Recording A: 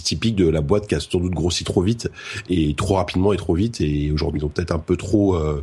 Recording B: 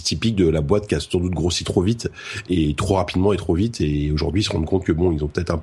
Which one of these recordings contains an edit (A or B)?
A